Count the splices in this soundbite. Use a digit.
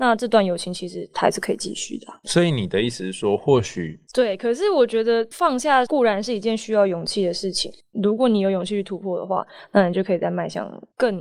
2